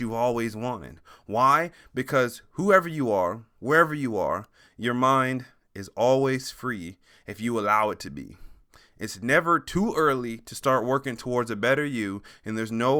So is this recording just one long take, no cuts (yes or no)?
yes